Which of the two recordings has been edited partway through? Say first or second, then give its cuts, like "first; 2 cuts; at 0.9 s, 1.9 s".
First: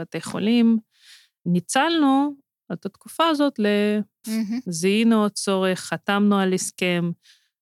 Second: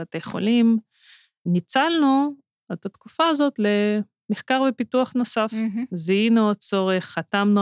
first; 1 cut; at 4.2 s